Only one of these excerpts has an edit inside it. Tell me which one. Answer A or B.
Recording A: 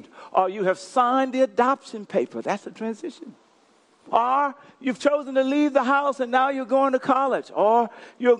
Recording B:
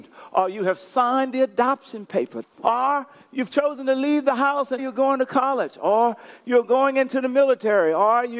B